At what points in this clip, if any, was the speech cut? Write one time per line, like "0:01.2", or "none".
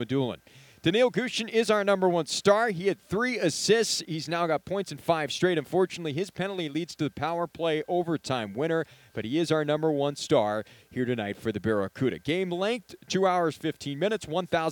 none